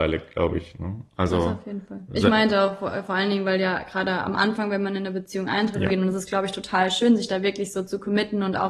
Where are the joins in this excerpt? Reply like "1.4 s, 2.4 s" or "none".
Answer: 5.9 s